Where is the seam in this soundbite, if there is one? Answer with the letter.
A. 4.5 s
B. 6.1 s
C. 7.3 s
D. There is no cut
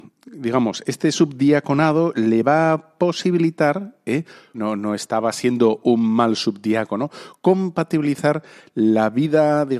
A